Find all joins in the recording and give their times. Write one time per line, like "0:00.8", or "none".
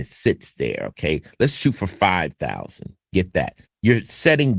0:03.6